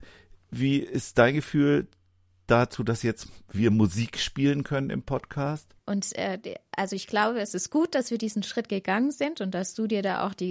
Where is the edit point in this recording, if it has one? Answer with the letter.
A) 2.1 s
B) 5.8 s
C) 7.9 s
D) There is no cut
B